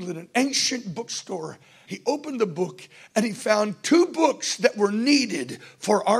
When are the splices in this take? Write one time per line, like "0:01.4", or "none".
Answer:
0:01.8